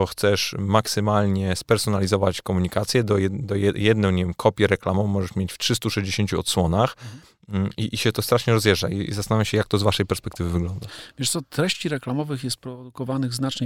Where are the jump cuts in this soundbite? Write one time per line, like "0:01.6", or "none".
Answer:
none